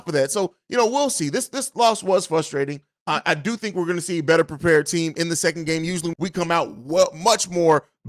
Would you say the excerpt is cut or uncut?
cut